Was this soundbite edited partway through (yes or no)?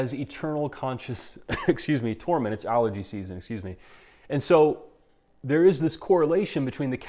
no